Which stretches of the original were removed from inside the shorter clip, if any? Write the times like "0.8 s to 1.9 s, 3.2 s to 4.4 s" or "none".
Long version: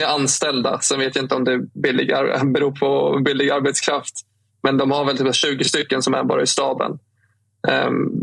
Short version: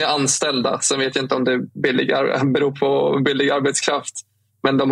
none